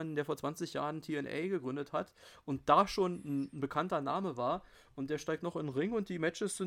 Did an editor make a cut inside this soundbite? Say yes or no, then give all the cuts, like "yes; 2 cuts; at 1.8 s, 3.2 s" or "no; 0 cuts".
no; 0 cuts